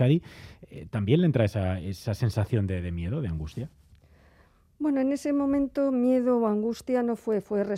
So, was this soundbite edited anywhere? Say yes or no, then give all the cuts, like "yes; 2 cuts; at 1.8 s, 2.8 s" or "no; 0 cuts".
no; 0 cuts